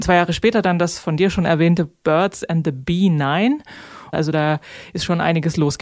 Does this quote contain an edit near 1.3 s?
no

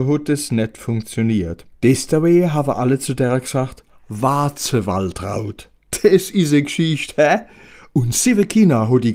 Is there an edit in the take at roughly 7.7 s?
no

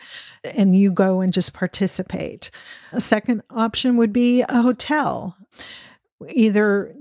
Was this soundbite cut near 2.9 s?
yes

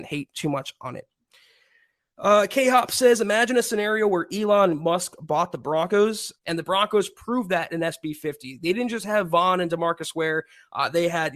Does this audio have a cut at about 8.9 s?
no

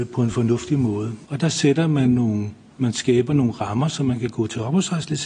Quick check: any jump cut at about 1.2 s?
yes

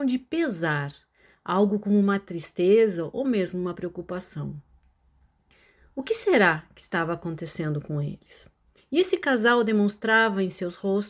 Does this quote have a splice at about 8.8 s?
yes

